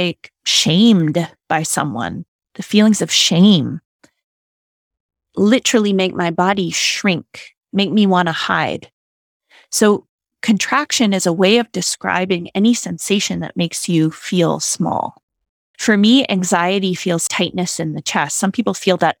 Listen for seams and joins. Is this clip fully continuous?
no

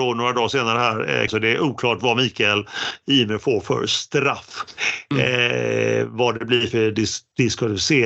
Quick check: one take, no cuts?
no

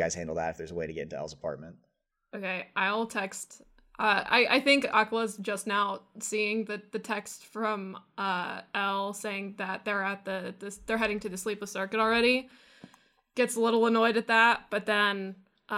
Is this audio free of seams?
yes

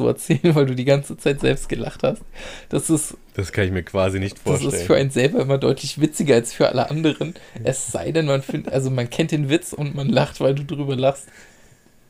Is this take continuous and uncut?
yes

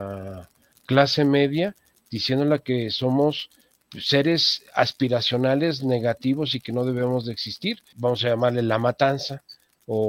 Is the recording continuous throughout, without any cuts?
no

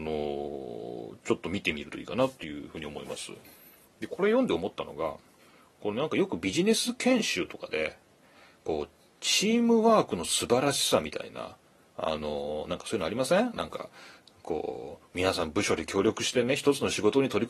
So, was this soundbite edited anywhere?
no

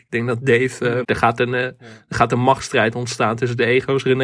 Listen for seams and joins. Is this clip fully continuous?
no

